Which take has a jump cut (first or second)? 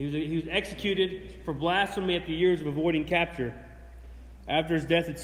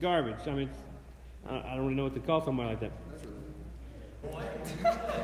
second